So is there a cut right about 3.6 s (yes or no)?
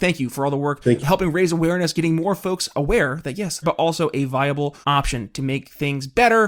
yes